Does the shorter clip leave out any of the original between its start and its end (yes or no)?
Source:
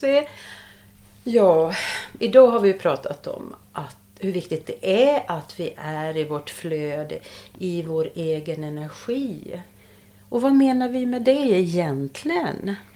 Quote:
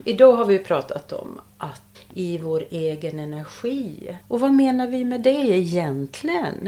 yes